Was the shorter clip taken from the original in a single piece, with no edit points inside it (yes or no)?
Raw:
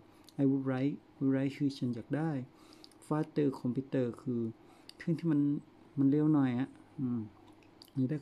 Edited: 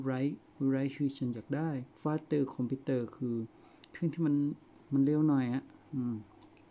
no